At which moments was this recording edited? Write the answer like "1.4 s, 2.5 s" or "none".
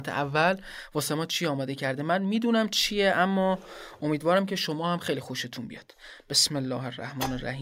none